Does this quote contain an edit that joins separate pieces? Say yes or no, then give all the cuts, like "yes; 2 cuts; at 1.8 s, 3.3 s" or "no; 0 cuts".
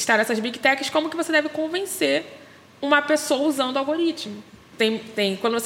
yes; 1 cut; at 4.7 s